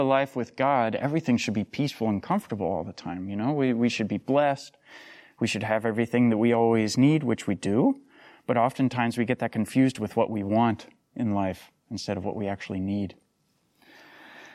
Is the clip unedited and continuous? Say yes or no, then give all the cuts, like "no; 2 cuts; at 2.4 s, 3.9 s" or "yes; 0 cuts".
yes; 0 cuts